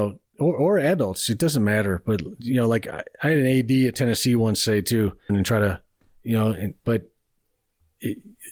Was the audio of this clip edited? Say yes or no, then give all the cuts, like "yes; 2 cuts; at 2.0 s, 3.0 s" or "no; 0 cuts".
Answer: yes; 2 cuts; at 5.3 s, 6.8 s